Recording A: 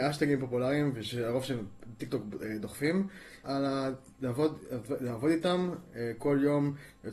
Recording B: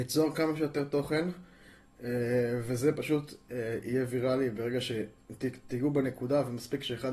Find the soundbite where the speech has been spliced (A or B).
A